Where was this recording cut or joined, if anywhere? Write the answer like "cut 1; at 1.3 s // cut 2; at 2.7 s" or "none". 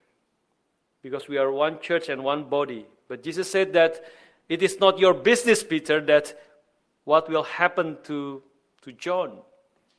none

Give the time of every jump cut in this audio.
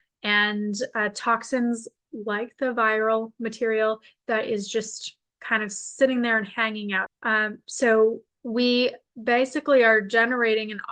cut 1; at 7.1 s // cut 2; at 8.4 s

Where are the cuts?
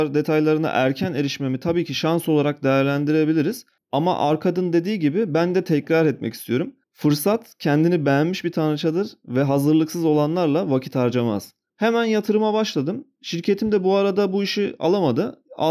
cut 1; at 6.8 s // cut 2; at 11.7 s

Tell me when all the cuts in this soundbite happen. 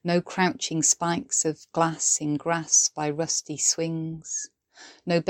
none

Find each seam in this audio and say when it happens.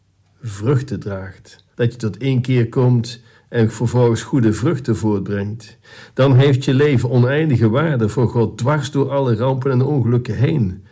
cut 1; at 1.7 s

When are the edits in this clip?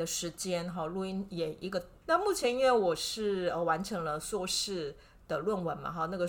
cut 1; at 2.0 s

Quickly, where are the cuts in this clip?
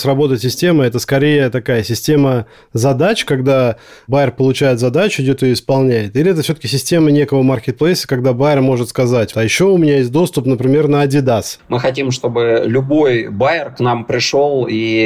cut 1; at 9.3 s // cut 2; at 11.6 s

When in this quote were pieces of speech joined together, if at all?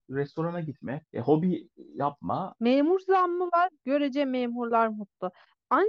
cut 1; at 1.0 s // cut 2; at 2.6 s

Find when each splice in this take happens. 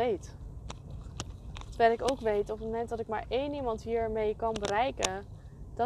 none

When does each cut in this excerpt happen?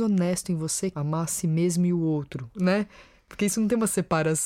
cut 1; at 0.9 s // cut 2; at 2.5 s

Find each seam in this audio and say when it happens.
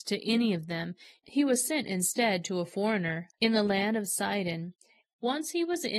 cut 1; at 3.3 s // cut 2; at 5.0 s

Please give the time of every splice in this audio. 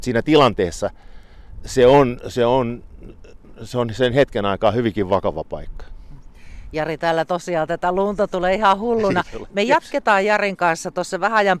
cut 1; at 9.5 s

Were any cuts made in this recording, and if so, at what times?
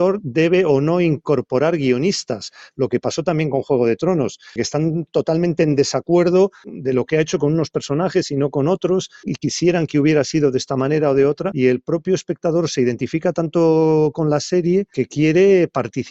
cut 1; at 2.7 s // cut 2; at 4.6 s

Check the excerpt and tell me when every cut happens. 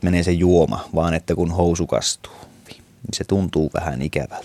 cut 1; at 2.7 s

